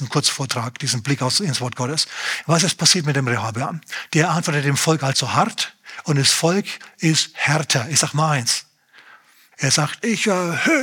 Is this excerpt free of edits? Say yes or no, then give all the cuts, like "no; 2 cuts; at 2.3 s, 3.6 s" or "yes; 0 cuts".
no; 1 cut; at 9.5 s